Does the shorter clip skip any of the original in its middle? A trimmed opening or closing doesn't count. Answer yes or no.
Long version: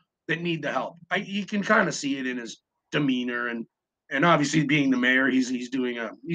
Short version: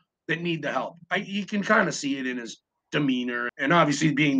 yes